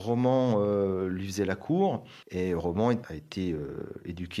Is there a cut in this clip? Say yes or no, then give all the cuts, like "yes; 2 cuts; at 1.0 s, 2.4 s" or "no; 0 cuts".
yes; 1 cut; at 2.2 s